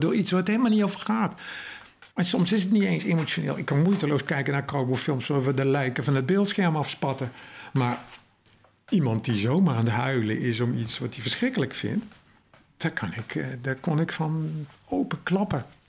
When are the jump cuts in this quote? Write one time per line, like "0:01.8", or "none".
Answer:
0:02.1